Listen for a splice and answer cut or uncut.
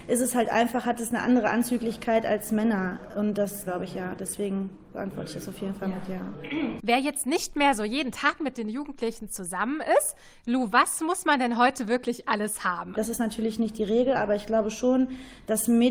cut